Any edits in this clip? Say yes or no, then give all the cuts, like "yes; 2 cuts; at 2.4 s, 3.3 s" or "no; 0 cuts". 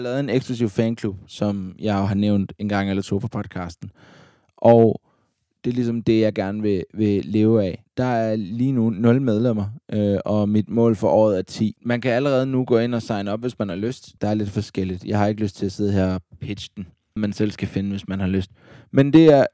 yes; 2 cuts; at 14.2 s, 17.2 s